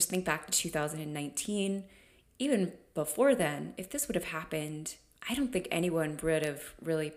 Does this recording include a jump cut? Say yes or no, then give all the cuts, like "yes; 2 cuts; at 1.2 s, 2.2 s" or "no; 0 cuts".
no; 0 cuts